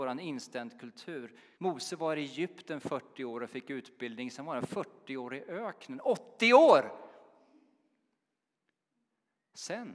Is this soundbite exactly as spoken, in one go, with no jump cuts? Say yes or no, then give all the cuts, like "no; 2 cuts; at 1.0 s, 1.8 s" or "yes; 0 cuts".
no; 1 cut; at 1.5 s